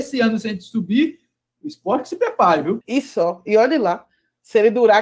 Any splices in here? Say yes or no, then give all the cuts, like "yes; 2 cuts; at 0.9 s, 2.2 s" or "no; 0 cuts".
yes; 1 cut; at 2.8 s